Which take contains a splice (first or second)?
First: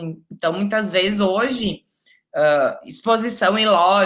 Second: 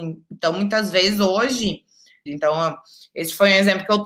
second